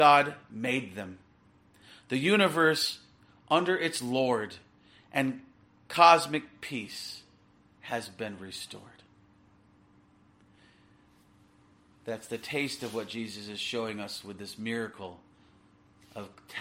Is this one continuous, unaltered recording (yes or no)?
yes